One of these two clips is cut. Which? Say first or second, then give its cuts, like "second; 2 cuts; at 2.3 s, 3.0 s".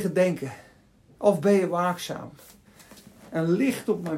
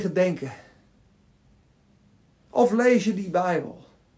first; 1 cut; at 1.0 s